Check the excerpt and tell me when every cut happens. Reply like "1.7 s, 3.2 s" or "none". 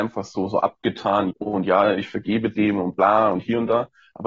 1.3 s